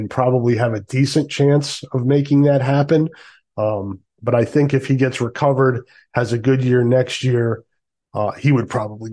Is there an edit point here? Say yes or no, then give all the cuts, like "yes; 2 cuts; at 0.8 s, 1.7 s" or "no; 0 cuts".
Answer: no; 0 cuts